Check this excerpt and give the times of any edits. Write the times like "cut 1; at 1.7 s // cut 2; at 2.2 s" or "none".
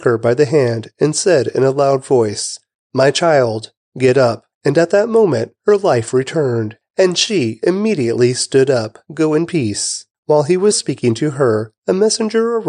cut 1; at 9.1 s // cut 2; at 10.7 s